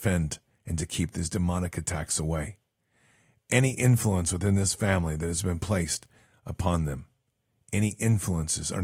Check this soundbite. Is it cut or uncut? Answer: uncut